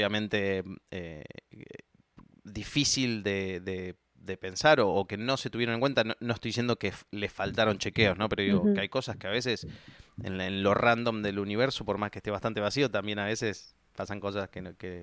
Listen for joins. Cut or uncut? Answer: uncut